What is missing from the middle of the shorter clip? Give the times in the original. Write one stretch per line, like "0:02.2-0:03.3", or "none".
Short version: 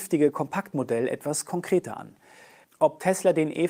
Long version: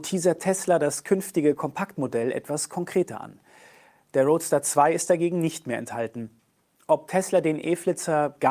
0:03.9-0:06.7

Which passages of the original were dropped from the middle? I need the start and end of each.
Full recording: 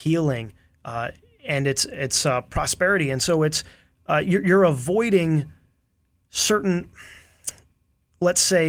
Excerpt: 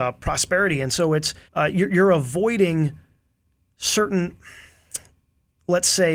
0:03.8-0:04.0

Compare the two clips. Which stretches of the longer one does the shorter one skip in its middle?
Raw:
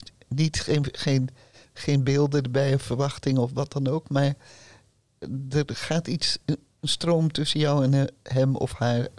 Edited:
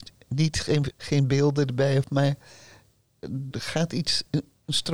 0:00.9-0:01.7
0:02.8-0:04.0
0:05.5-0:05.7

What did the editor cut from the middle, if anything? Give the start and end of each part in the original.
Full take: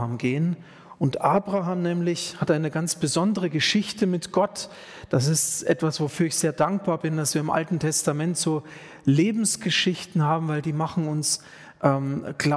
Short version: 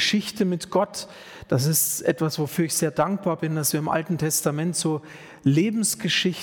none

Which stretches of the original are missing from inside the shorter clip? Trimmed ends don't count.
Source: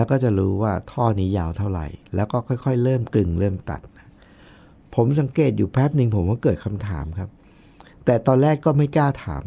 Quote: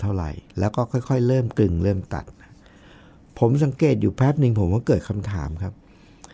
none

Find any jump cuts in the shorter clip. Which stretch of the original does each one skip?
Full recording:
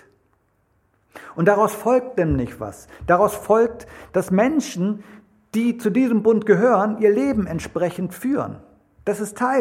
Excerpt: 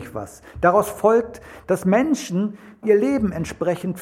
0:05.3-0:07.0

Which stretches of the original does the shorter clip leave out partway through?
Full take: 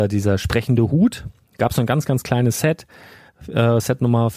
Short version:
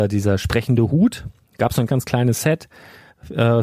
0:01.9-0:02.1

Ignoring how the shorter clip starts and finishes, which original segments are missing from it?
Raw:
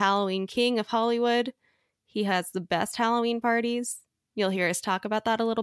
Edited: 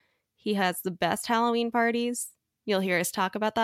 none

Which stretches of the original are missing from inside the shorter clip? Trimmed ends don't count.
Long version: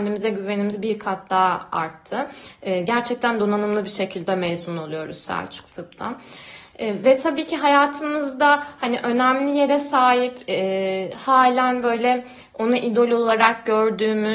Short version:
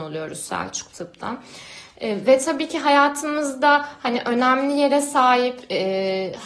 none

